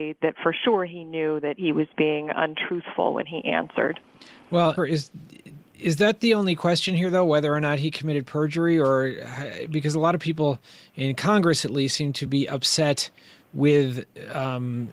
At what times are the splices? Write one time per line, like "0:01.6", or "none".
0:04.8